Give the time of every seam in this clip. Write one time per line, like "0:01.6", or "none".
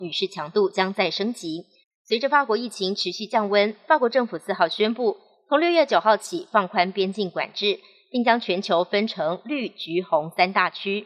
0:01.8